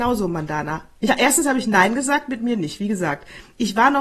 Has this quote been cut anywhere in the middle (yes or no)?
no